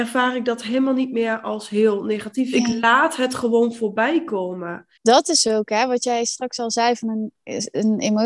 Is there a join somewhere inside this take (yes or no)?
yes